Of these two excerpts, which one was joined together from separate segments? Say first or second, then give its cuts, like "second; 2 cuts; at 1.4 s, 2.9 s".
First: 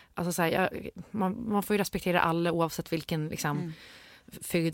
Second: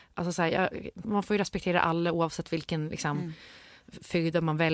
second; 1 cut; at 1.0 s